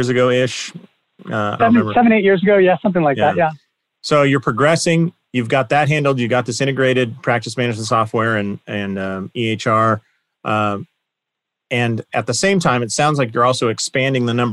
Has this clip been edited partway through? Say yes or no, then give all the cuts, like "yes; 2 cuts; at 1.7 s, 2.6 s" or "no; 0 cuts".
yes; 1 cut; at 1.6 s